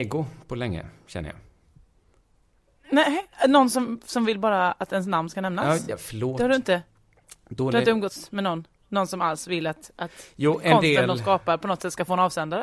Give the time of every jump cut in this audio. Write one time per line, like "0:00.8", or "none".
none